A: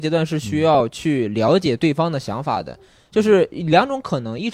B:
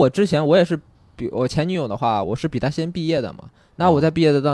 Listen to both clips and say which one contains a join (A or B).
B